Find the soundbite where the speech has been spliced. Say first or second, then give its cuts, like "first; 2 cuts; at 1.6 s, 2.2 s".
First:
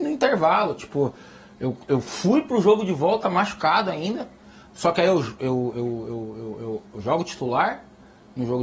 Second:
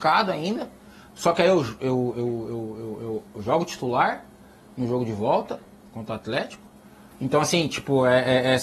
second; 1 cut; at 7.1 s